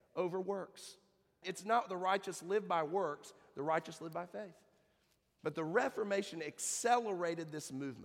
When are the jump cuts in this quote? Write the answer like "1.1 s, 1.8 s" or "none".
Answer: 1.4 s, 5.4 s